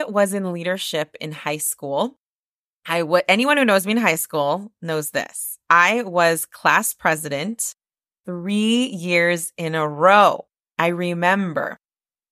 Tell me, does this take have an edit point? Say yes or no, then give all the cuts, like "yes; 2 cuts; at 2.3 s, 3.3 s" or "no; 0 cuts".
no; 0 cuts